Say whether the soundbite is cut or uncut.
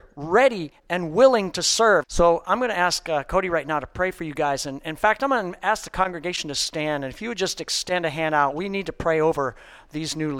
cut